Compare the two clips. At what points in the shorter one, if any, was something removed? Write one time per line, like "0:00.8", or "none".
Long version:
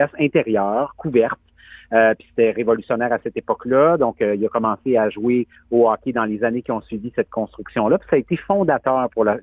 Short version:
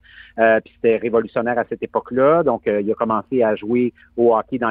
none